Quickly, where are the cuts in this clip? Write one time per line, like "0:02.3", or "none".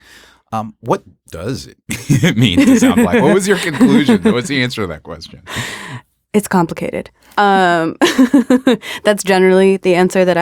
none